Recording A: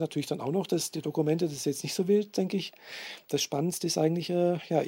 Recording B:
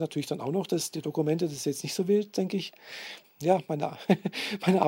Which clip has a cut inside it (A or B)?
B